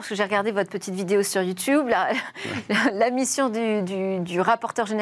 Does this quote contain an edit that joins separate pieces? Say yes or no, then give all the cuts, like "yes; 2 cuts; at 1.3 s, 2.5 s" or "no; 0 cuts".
no; 0 cuts